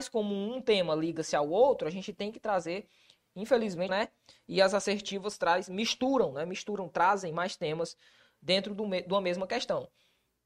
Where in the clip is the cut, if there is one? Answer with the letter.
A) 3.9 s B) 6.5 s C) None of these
A